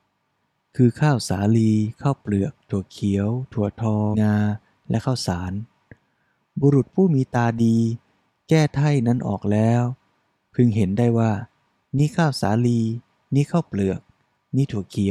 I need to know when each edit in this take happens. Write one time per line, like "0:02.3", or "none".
0:04.1